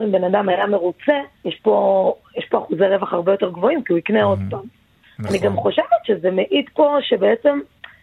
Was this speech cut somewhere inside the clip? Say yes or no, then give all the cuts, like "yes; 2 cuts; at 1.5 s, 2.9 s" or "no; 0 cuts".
yes; 1 cut; at 1.4 s